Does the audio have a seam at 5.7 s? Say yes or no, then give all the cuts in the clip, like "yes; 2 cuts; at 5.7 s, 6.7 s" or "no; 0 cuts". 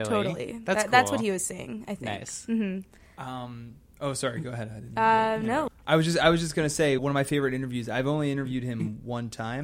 yes; 2 cuts; at 5.7 s, 7.0 s